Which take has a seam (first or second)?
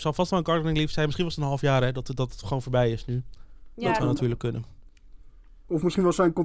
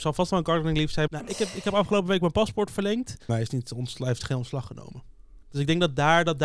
second